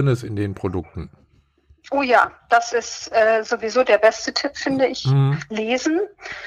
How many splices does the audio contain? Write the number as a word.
zero